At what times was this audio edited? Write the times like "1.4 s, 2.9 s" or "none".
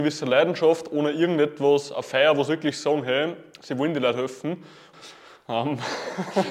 4.9 s